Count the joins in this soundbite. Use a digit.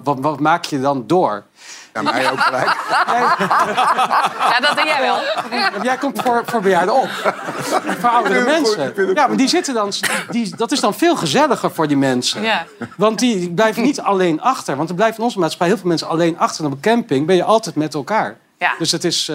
1